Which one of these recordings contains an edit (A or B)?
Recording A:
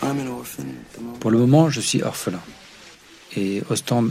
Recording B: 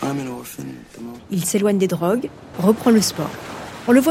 B